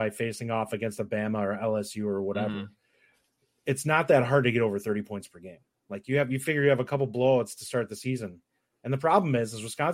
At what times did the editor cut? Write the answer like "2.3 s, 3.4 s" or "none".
none